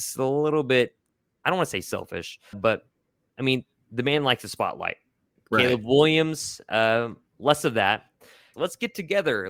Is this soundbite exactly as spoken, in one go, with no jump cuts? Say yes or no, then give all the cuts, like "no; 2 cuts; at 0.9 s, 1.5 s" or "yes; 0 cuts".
no; 2 cuts; at 2.5 s, 8.5 s